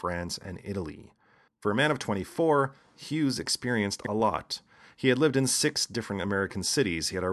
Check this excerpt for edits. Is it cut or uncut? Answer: cut